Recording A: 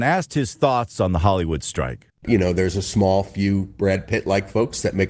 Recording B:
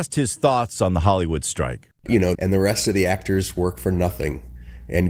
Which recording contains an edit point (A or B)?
B